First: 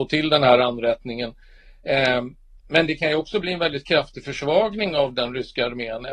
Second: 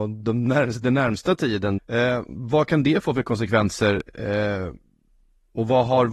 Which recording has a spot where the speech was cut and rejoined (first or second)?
second